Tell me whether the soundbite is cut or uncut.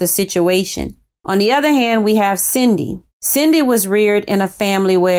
cut